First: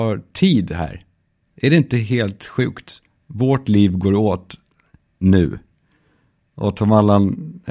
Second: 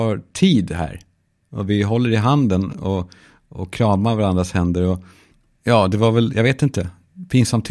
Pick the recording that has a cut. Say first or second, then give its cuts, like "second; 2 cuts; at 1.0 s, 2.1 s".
first; 1 cut; at 1.5 s